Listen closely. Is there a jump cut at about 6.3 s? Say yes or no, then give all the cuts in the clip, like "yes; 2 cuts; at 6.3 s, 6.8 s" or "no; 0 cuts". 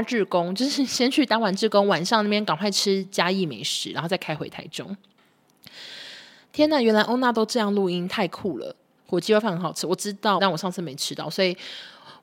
no; 2 cuts; at 9.0 s, 10.4 s